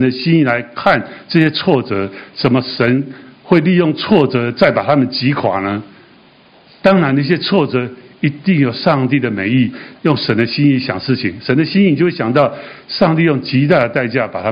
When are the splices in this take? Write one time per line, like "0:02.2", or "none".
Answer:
0:09.9